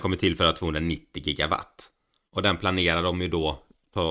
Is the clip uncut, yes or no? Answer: yes